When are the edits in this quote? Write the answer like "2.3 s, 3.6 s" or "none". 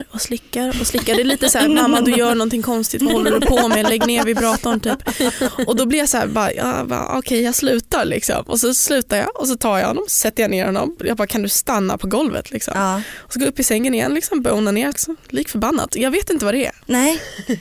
14.9 s